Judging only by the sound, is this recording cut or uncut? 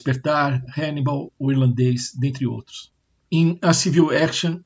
uncut